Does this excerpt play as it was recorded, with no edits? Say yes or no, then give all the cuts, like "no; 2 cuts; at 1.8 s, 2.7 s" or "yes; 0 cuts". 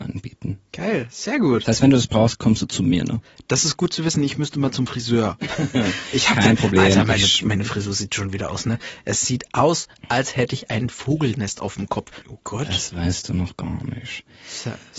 no; 1 cut; at 12.2 s